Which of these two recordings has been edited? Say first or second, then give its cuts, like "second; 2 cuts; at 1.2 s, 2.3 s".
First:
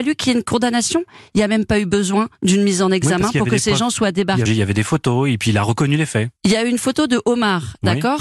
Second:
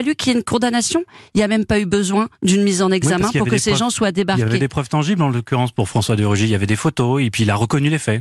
first; 1 cut; at 4.5 s